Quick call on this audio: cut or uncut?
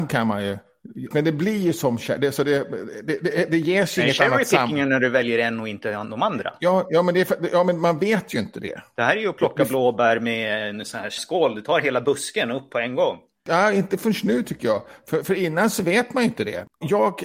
cut